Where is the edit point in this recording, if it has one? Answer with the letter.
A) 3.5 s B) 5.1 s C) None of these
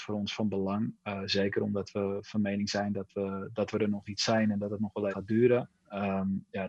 B